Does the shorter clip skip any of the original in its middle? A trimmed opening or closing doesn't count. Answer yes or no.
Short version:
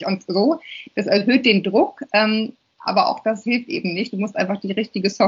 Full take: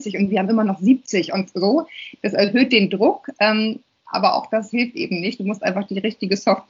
no